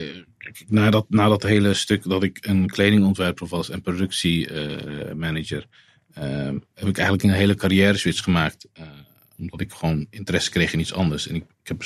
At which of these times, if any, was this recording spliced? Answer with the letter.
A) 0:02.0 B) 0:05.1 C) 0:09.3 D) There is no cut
D